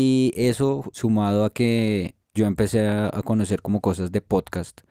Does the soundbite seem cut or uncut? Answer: uncut